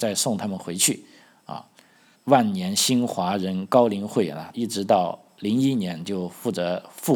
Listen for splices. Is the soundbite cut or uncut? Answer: cut